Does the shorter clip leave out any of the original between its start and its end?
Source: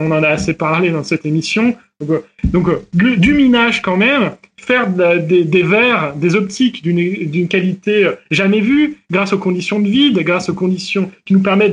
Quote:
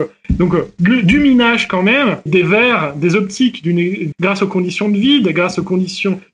yes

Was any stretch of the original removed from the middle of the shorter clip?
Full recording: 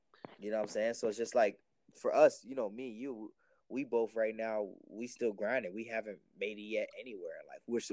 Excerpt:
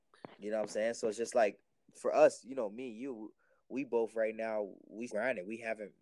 yes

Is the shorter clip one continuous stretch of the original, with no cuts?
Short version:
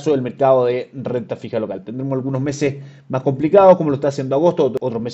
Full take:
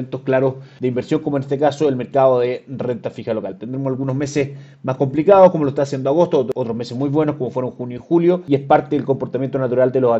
yes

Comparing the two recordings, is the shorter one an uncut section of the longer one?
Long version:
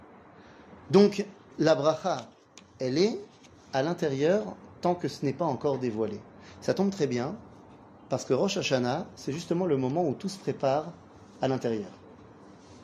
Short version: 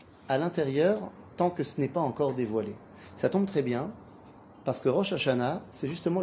yes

